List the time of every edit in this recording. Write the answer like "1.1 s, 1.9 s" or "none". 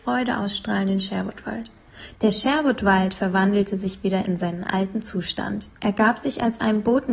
2.1 s, 5.7 s

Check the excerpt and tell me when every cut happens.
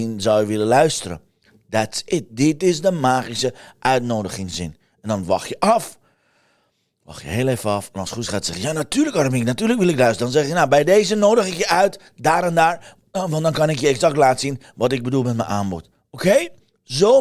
none

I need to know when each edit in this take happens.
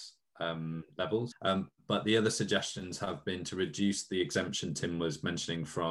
1.3 s

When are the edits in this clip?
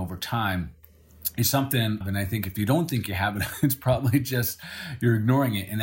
2.0 s

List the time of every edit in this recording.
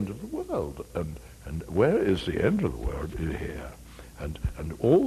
none

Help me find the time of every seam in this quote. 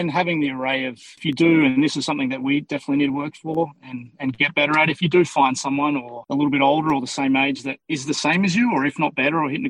none

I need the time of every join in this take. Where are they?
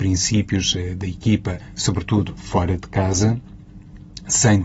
none

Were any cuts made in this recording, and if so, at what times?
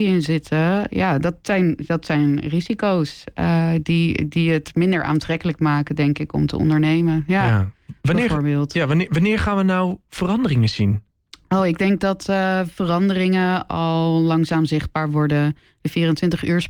none

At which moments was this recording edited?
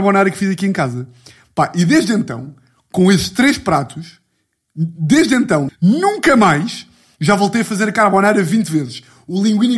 5.7 s

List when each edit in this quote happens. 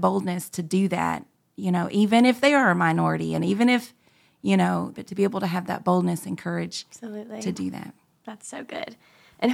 4.9 s

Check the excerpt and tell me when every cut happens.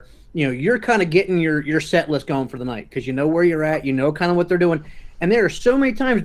none

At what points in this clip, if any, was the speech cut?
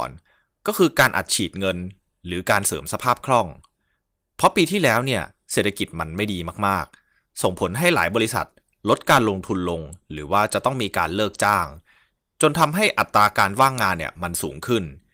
none

